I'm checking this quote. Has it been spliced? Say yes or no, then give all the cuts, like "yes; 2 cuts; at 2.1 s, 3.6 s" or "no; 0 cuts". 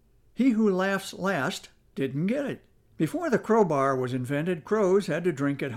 yes; 1 cut; at 2.9 s